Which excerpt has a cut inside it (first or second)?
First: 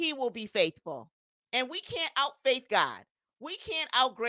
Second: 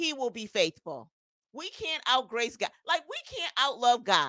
second